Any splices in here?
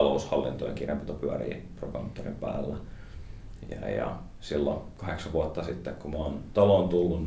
no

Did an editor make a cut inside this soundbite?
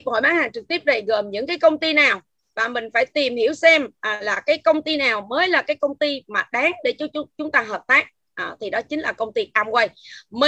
no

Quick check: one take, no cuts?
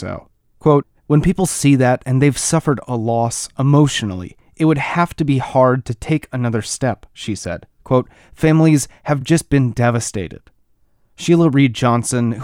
yes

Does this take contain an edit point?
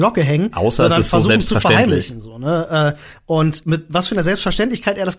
yes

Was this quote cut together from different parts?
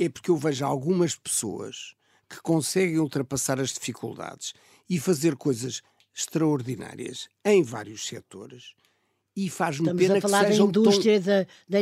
no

